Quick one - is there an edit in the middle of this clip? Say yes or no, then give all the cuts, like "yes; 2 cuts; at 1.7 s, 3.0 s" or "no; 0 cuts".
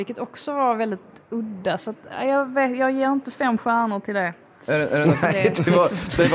no; 0 cuts